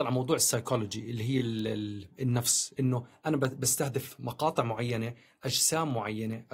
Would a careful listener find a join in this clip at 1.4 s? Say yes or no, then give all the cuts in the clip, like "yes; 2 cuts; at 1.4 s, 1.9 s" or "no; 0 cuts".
no; 0 cuts